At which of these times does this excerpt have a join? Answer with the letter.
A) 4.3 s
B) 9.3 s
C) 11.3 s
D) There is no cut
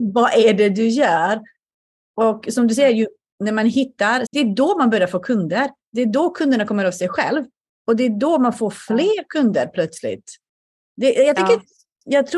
A